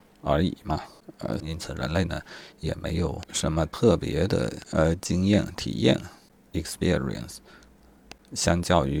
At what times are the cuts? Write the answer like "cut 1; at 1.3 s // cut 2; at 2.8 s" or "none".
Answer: cut 1; at 1.4 s